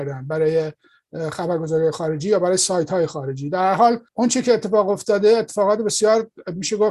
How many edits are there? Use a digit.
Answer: 1